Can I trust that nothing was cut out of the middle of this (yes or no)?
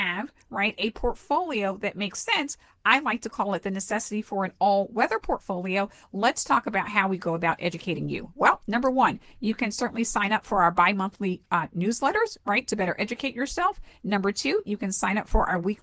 yes